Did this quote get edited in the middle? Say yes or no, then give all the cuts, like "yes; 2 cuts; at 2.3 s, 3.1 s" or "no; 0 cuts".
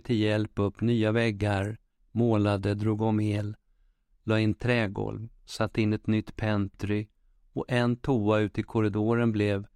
no; 0 cuts